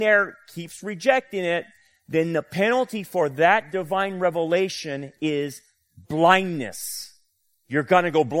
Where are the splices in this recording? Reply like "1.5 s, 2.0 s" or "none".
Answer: none